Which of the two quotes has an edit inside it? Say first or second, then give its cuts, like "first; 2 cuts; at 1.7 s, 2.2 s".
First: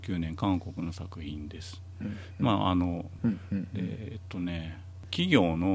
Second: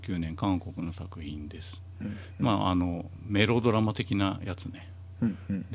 first; 1 cut; at 3.2 s